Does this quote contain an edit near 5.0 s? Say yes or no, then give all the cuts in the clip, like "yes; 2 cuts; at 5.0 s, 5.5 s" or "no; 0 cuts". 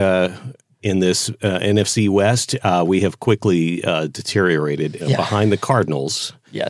yes; 1 cut; at 5.0 s